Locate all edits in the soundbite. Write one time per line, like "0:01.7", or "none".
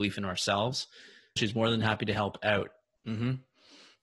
0:01.4
0:03.0